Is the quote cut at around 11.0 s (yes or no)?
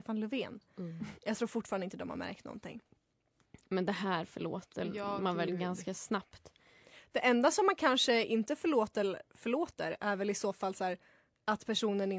no